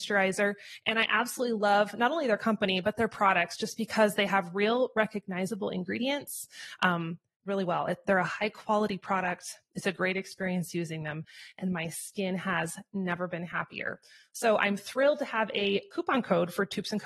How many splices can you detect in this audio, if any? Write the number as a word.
one